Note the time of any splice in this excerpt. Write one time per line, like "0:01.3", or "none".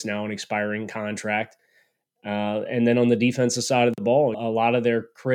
0:04.3